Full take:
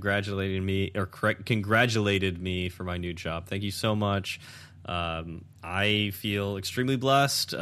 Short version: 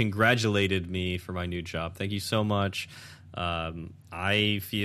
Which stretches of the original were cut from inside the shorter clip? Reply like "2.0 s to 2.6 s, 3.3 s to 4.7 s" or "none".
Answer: none